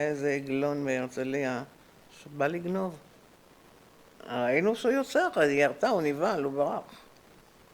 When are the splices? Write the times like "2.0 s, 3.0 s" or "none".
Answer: none